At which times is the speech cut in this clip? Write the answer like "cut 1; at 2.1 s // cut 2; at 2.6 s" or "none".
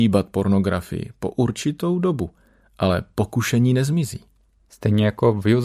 none